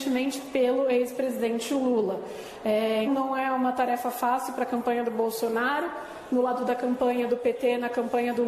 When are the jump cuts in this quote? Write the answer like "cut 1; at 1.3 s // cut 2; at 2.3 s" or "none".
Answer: cut 1; at 3.1 s